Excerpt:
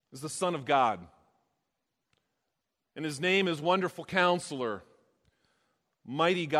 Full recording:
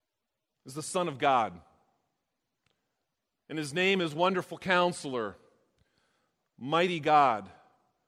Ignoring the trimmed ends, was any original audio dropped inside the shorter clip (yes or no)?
no